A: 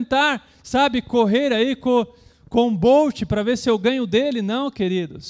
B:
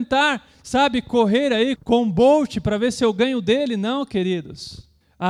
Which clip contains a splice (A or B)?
B